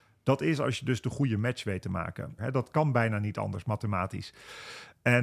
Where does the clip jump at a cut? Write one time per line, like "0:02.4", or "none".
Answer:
0:02.4

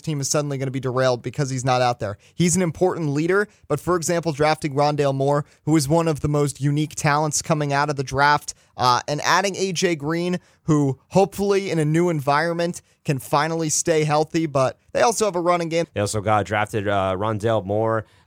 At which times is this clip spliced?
0:15.8

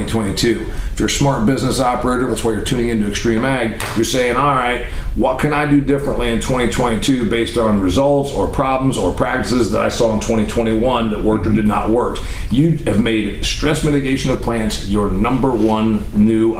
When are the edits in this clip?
0:02.3

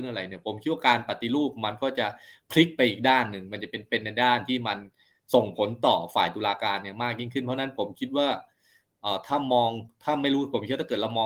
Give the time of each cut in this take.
none

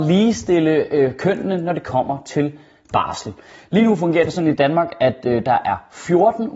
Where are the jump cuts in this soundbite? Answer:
none

